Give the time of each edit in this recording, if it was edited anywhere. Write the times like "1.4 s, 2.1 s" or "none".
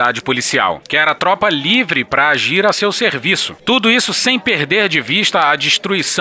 3.6 s

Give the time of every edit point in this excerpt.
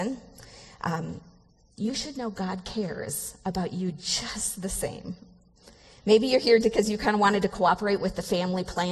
6.6 s

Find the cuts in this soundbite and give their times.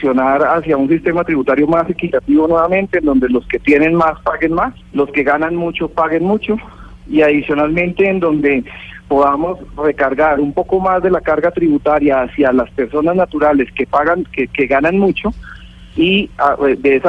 4.8 s

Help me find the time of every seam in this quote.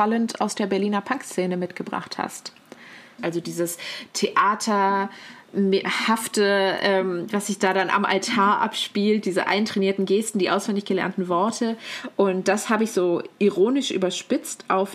3.2 s

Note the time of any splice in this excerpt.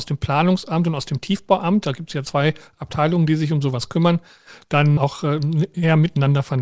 5.0 s

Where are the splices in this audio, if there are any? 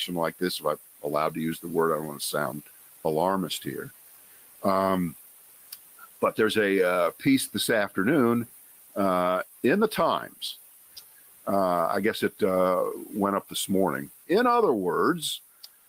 14.2 s

